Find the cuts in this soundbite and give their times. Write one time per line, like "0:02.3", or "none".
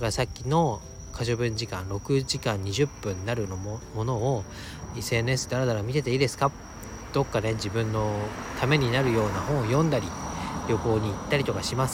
none